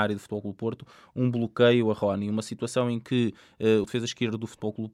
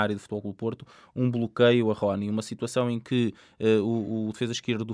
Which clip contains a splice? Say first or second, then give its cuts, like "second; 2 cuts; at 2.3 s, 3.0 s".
first; 1 cut; at 3.8 s